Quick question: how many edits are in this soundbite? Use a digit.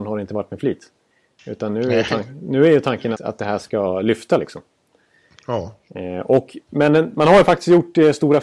1